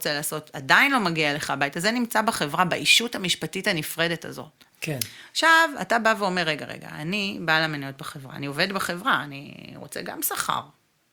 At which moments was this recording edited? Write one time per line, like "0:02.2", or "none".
0:04.7